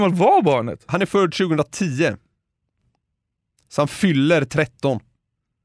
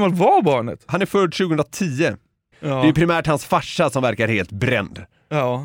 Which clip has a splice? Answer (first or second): second